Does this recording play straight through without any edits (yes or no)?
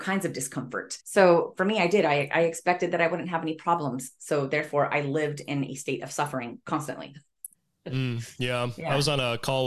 no